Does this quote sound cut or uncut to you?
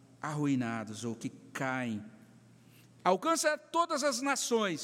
cut